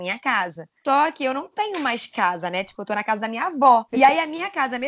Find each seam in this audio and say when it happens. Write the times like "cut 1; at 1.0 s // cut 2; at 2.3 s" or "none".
cut 1; at 3.9 s

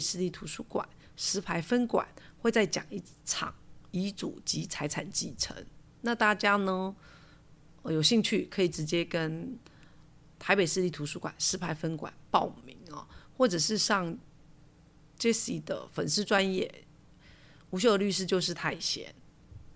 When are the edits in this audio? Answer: none

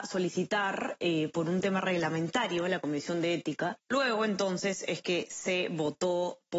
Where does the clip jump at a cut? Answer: cut 1; at 3.8 s

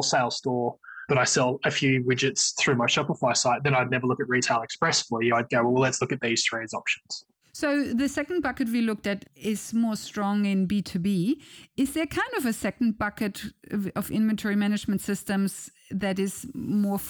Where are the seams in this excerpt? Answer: none

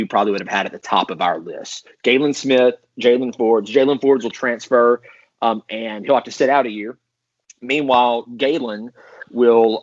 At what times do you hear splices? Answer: none

